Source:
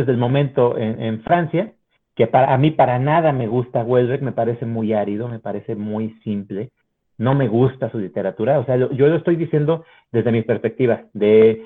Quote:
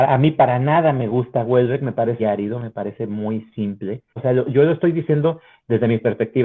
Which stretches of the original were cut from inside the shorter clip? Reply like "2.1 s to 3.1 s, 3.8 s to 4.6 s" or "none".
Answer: 4.6 s to 4.9 s, 6.8 s to 8.6 s